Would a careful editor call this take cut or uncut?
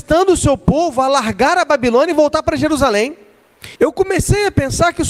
cut